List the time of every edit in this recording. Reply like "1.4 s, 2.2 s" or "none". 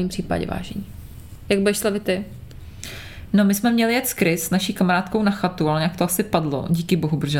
none